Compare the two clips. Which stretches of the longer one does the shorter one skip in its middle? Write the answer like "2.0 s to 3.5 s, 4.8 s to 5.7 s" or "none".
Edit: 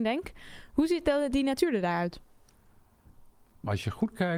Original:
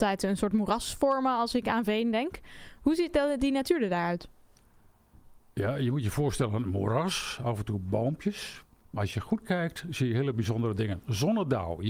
5.5 s to 8.7 s